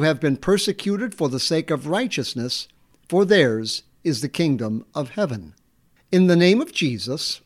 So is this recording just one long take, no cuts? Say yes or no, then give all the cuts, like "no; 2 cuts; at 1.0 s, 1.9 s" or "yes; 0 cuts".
no; 1 cut; at 6.0 s